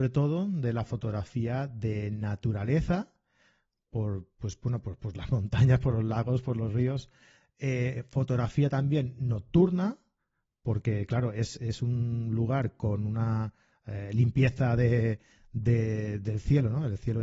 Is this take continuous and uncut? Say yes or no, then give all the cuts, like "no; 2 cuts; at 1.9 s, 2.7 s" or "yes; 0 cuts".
yes; 0 cuts